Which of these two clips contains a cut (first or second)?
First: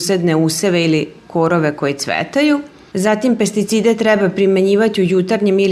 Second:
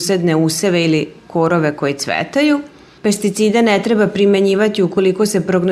first